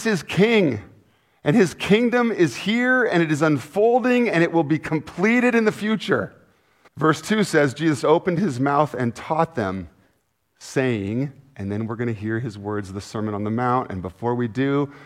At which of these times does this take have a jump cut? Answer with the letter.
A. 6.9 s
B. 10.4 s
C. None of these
A